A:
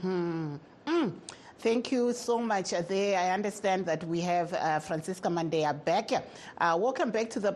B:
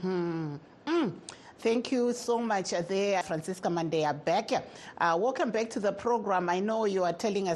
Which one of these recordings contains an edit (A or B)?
B